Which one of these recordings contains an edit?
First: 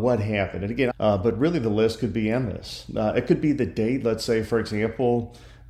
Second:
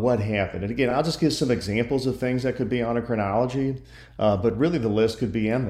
first; 1 cut; at 0.9 s

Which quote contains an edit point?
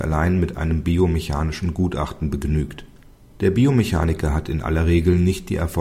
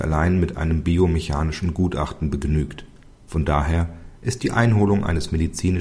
second; 1 cut; at 3.3 s

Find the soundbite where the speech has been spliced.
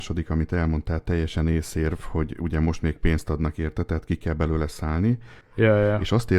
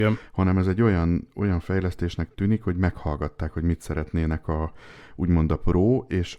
first; 1 cut; at 5.4 s

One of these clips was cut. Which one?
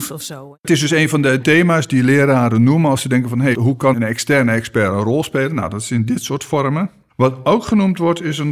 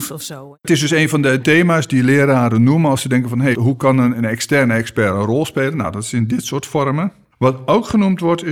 first; 1 cut; at 3.9 s

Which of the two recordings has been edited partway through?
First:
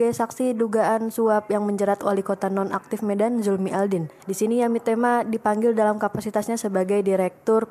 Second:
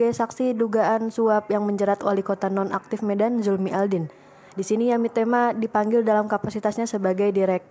first; 1 cut; at 4.2 s

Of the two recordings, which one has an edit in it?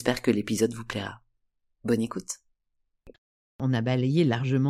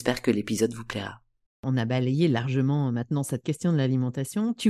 second; 1 cut; at 1.5 s

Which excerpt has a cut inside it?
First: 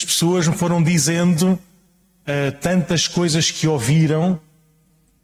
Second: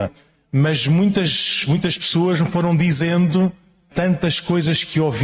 second; 1 cut; at 3.9 s

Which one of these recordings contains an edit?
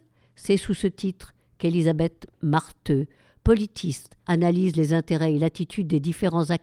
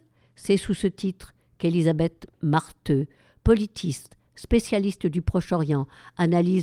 first; 1 cut; at 4.2 s

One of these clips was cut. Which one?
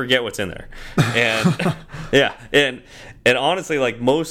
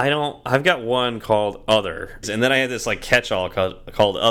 second; 1 cut; at 2.2 s

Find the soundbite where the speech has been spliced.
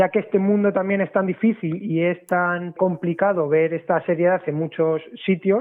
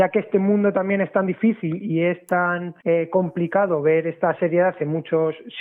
first; 1 cut; at 2.8 s

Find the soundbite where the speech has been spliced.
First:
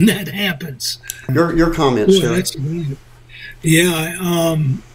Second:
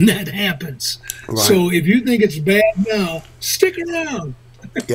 first; 1 cut; at 1.3 s

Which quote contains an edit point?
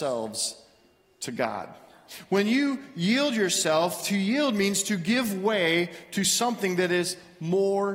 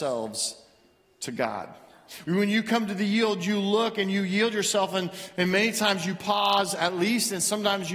second; 1 cut; at 2.2 s

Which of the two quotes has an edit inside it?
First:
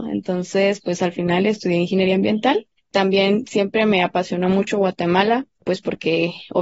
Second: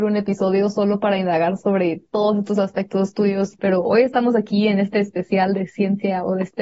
second; 1 cut; at 3.6 s

